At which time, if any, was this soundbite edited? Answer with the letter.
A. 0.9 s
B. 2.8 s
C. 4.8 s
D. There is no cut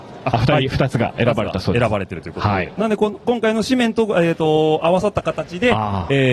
D